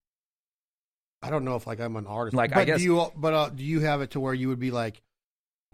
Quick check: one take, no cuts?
no; 1 cut; at 2.3 s

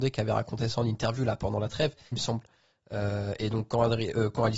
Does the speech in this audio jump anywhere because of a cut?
yes; 1 cut; at 2.1 s

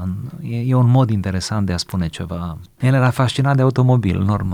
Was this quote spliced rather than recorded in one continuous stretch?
yes; 1 cut; at 2.7 s

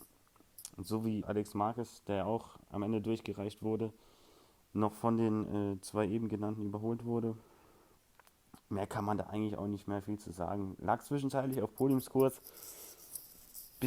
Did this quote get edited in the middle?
yes; 2 cuts; at 1.2 s, 8.6 s

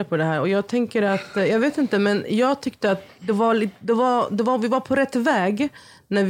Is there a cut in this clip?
no; 0 cuts

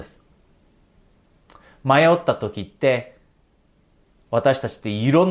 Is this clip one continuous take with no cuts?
yes; 0 cuts

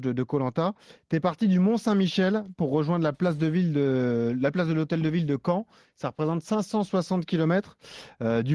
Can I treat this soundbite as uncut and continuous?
yes; 0 cuts

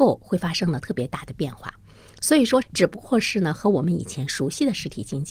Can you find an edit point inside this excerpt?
yes; 1 cut; at 2.6 s

